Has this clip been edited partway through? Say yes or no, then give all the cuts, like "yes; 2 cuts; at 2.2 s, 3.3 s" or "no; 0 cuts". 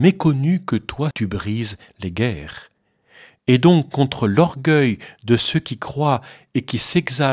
yes; 1 cut; at 1.1 s